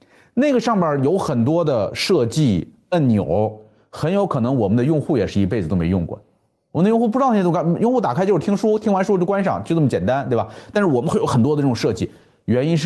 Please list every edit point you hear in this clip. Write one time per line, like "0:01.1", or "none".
none